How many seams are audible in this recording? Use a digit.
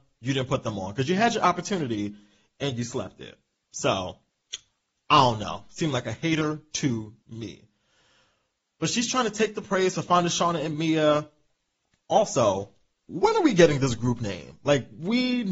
0